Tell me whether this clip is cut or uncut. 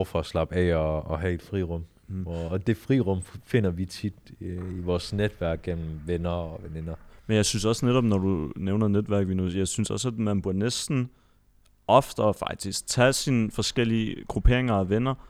uncut